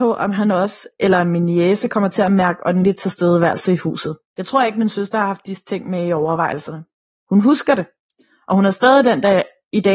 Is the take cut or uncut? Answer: cut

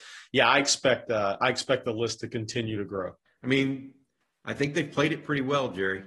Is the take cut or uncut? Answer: cut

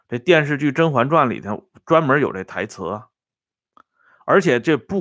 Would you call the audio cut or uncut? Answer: uncut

